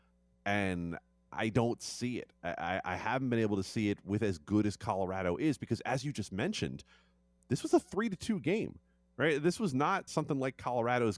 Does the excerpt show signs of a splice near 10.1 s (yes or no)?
yes